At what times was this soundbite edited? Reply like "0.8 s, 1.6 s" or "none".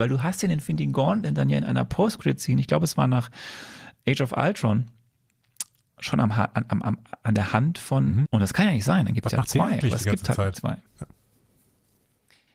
8.3 s, 10.9 s